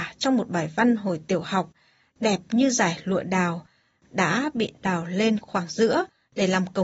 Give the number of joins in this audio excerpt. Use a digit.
0